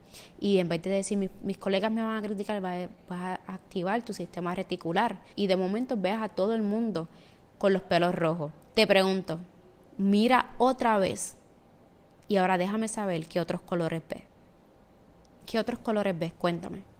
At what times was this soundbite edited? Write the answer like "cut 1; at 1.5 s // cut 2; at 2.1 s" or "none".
cut 1; at 5.3 s // cut 2; at 8.7 s